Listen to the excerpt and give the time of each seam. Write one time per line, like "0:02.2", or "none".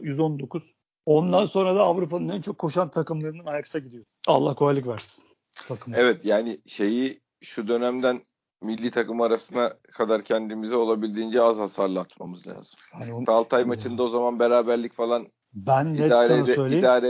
0:04.1
0:13.2